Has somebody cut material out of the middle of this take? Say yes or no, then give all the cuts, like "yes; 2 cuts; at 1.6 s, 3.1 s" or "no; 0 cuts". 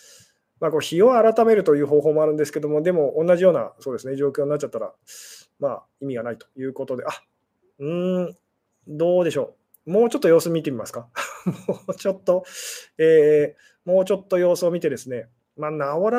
no; 0 cuts